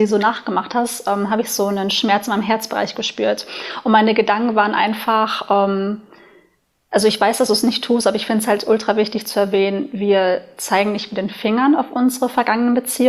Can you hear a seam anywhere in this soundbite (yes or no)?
no